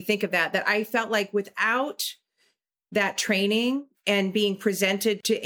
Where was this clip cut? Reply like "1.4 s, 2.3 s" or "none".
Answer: none